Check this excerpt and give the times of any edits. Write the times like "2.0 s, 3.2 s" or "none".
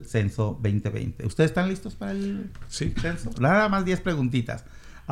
3.3 s